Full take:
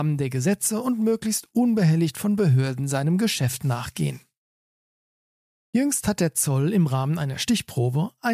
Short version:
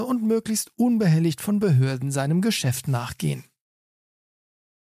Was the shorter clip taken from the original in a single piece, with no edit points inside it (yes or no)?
yes